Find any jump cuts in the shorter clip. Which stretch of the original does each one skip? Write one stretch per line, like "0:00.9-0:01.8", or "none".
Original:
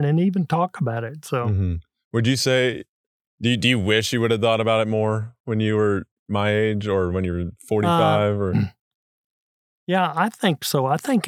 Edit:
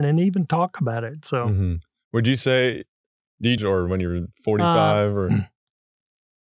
0:03.6-0:06.8